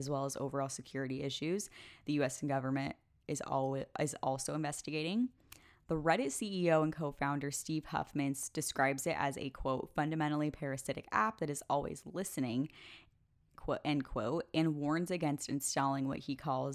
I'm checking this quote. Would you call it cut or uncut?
uncut